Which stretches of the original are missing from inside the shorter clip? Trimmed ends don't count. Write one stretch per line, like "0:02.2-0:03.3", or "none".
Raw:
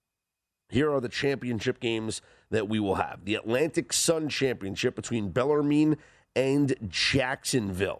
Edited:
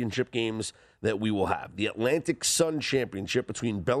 none